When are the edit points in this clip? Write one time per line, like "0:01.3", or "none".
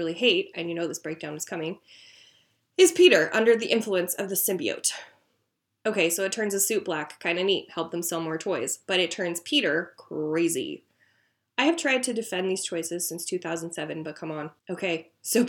0:14.6